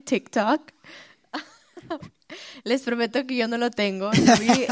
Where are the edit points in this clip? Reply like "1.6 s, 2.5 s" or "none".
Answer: none

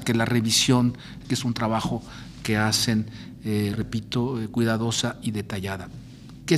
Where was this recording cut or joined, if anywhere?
1.2 s, 3.7 s

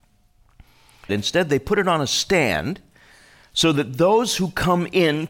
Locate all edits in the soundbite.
1.1 s

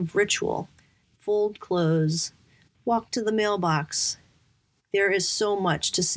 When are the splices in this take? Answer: 1.0 s, 2.7 s

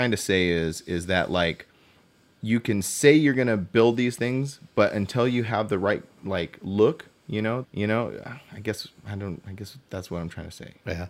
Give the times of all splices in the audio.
7.6 s

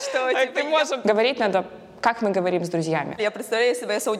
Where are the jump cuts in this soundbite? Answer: 1.0 s, 3.2 s

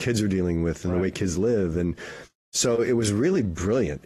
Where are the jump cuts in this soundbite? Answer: none

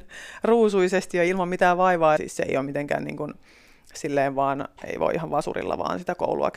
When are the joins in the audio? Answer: 2.2 s

